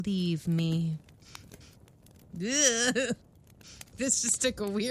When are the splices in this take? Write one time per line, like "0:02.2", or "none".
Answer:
0:03.9